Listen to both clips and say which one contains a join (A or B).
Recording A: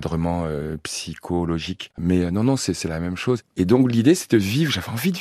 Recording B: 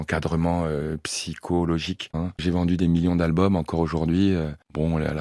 B